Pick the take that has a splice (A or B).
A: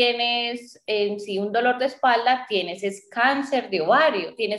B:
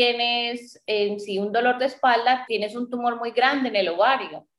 B